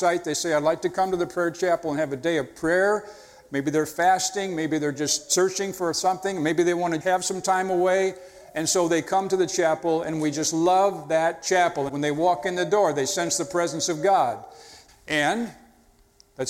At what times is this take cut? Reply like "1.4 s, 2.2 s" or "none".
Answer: 7.0 s, 11.9 s, 14.9 s